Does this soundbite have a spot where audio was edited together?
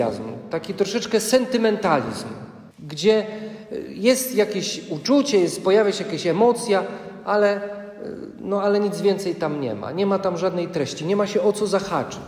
yes; 1 cut; at 2.7 s

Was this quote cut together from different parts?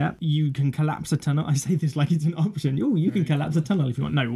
no; 0 cuts

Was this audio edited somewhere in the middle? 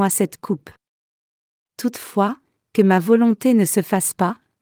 no; 0 cuts

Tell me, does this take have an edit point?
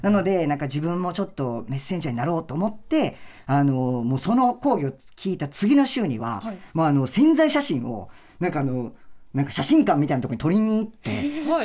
no; 0 cuts

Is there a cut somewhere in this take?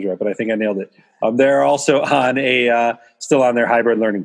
no; 0 cuts

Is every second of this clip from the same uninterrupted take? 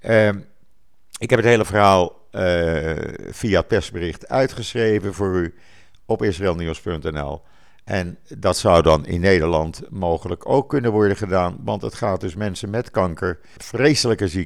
no; 1 cut; at 13.6 s

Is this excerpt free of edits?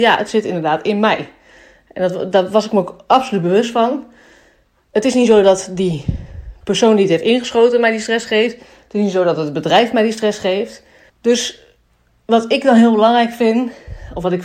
no; 1 cut; at 11.1 s

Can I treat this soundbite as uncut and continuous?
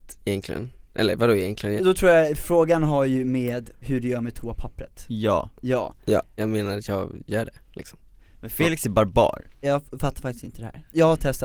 no; 3 cuts; at 1.8 s, 6.4 s, 9.6 s

